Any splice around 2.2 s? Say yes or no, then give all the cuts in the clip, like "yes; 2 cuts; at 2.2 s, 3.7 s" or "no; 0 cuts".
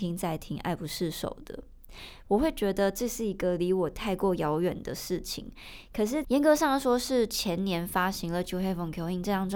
yes; 2 cuts; at 2.2 s, 6.2 s